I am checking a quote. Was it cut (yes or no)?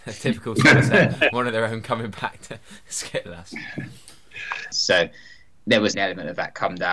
yes